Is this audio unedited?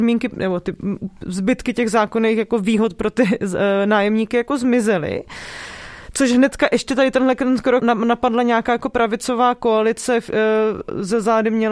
no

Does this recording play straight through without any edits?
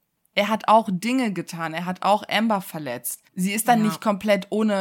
no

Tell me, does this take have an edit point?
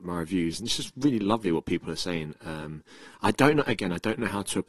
no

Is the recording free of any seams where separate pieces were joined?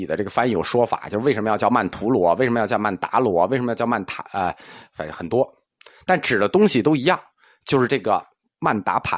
yes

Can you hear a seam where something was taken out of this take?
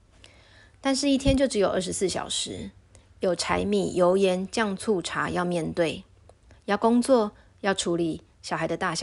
no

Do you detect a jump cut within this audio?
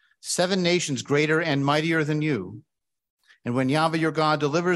no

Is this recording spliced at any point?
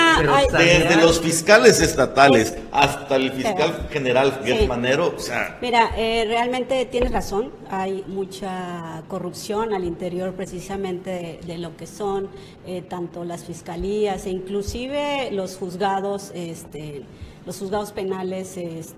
yes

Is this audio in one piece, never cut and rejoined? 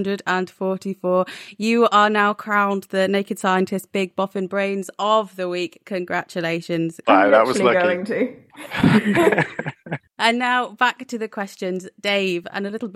no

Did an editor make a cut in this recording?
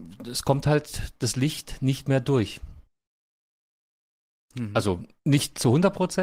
no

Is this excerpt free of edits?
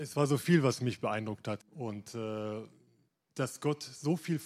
no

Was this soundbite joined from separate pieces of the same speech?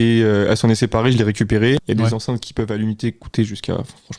yes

